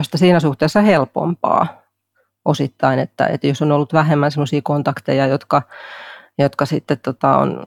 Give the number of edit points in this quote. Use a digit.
0